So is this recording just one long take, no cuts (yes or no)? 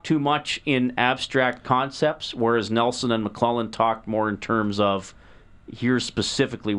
yes